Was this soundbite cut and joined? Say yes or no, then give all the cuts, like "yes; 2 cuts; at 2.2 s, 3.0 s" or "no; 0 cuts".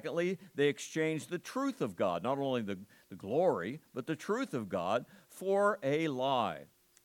no; 0 cuts